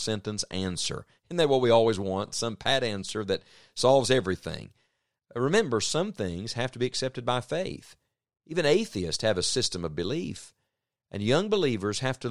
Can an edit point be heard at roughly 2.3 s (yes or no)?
no